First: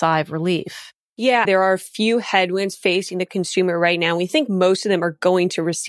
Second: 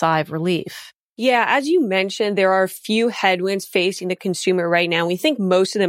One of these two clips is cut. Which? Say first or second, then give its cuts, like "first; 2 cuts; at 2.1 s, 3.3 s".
first; 1 cut; at 1.4 s